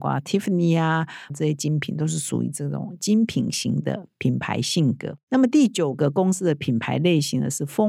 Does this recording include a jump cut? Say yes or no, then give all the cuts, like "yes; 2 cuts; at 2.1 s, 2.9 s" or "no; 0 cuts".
yes; 1 cut; at 1.3 s